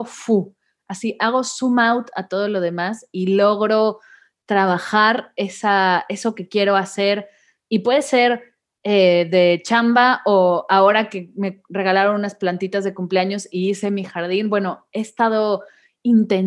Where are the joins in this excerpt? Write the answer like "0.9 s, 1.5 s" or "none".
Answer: none